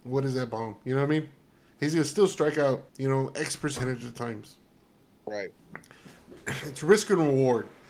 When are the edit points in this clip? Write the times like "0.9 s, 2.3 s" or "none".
2.9 s